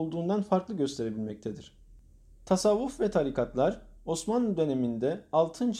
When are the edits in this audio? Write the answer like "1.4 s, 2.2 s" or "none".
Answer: none